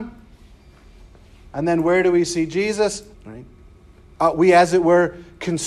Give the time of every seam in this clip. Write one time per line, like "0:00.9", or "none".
0:03.1

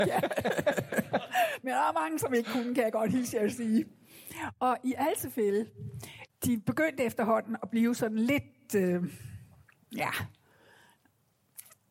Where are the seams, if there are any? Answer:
0:06.3

